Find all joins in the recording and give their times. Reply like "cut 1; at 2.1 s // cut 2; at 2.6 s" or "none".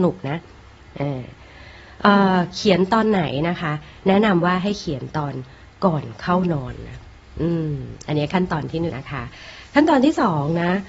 cut 1; at 8.9 s